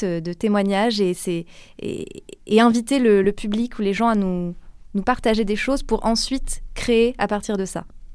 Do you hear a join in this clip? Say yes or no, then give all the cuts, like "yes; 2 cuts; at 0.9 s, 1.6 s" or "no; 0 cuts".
yes; 1 cut; at 3.2 s